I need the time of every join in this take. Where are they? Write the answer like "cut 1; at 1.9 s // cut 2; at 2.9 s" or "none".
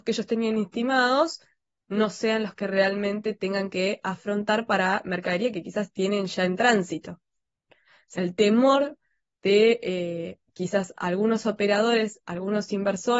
cut 1; at 7.7 s